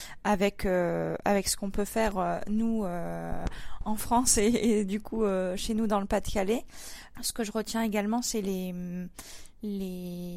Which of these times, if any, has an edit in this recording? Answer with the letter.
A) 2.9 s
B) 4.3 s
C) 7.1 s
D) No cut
C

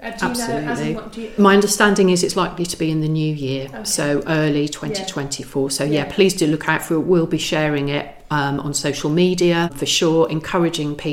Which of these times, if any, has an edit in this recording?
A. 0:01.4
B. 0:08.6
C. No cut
A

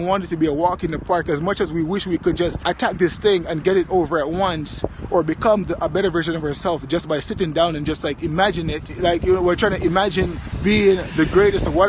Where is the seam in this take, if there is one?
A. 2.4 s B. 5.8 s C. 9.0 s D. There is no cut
D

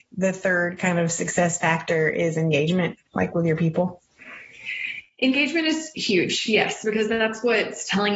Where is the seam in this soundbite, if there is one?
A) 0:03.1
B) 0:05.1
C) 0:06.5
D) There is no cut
D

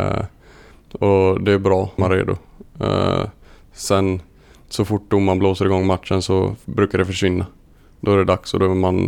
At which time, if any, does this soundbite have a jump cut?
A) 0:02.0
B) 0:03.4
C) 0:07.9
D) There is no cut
A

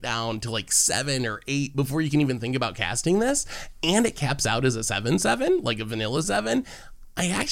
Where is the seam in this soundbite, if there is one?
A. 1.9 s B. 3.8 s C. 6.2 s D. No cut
C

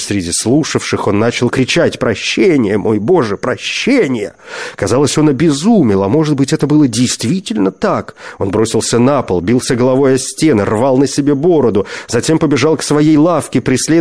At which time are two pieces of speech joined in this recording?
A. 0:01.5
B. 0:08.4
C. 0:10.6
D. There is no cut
A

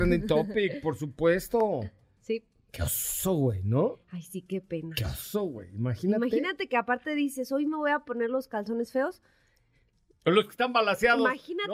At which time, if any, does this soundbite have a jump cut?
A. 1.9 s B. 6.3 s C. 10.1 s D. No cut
D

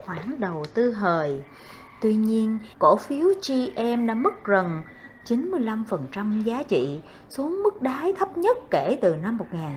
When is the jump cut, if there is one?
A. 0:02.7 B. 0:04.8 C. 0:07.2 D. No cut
A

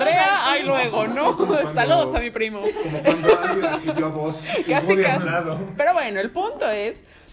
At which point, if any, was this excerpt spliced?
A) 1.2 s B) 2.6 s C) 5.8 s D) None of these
C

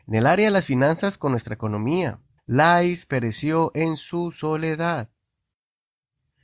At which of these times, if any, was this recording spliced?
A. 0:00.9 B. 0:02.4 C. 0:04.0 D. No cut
B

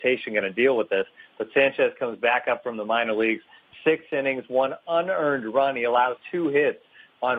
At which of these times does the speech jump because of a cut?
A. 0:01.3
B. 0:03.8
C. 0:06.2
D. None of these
C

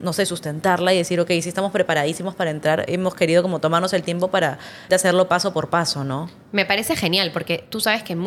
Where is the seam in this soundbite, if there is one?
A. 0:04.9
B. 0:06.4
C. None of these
A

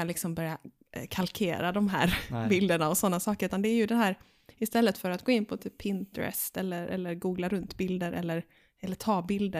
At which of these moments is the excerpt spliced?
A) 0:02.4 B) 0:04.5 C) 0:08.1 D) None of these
D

